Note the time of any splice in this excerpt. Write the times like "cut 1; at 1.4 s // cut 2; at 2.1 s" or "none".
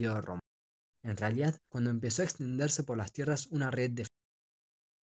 cut 1; at 1.7 s

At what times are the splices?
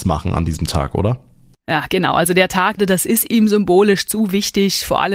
cut 1; at 2.8 s

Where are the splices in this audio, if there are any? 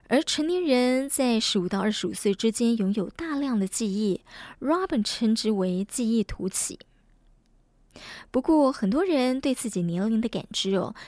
none

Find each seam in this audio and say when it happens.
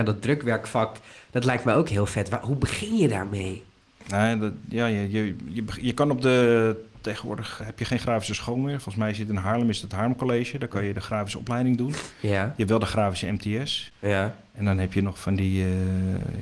cut 1; at 7.6 s

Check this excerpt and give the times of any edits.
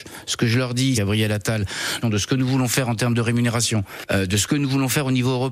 cut 1; at 0.9 s // cut 2; at 2.0 s

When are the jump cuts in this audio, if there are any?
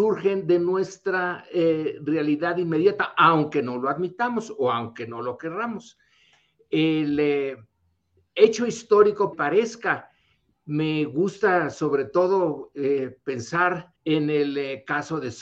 cut 1; at 9.3 s // cut 2; at 14.0 s

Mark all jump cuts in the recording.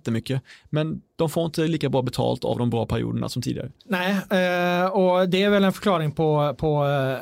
cut 1; at 3.8 s

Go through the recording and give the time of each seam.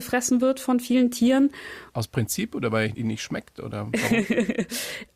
cut 1; at 1.9 s

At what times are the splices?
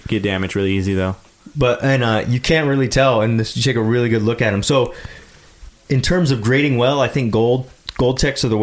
none

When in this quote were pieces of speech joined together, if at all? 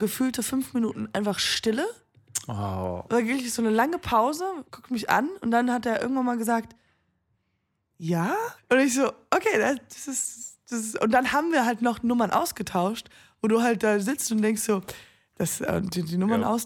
cut 1; at 4.7 s // cut 2; at 8.6 s

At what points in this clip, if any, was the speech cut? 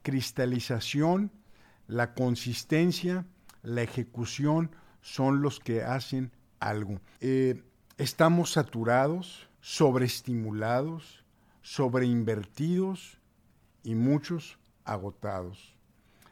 cut 1; at 7.2 s // cut 2; at 9.5 s

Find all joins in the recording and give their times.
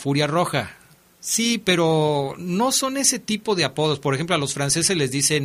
none

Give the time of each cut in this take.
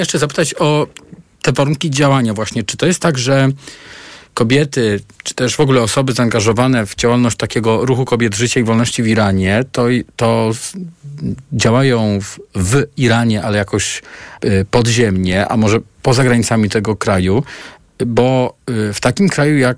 cut 1; at 14.4 s

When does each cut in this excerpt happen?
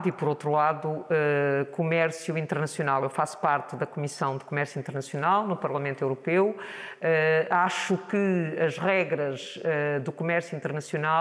none

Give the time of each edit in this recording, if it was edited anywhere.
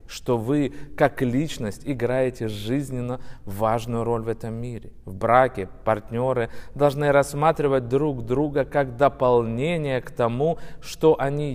none

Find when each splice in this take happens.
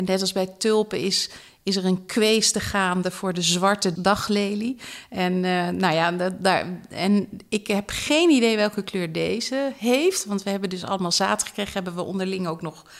none

